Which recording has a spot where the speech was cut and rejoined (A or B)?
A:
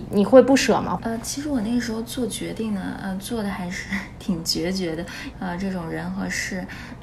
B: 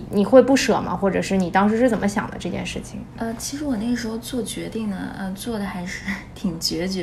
A